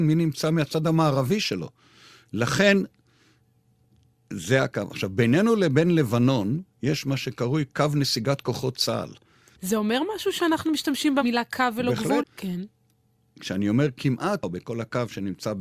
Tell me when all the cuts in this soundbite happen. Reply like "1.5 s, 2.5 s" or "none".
9.6 s, 12.2 s, 14.4 s